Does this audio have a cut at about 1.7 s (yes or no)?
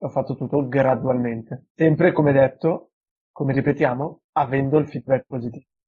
yes